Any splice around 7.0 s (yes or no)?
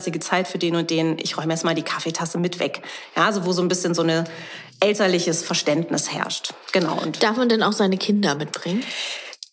no